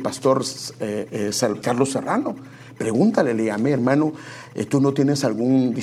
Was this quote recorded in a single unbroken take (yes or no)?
no